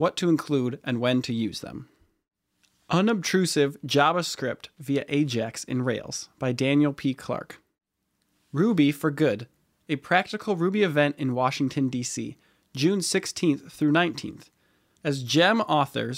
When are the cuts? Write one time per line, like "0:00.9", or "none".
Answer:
0:14.9